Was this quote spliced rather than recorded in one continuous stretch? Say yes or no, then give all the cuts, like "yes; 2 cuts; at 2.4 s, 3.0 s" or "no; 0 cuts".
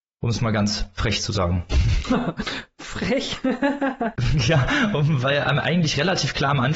no; 0 cuts